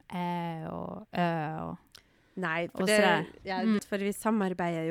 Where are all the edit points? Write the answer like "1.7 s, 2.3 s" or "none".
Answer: 3.8 s